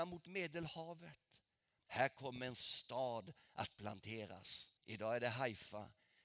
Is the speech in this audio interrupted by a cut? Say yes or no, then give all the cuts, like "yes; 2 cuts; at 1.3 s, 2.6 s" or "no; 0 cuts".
yes; 2 cuts; at 1.9 s, 4.8 s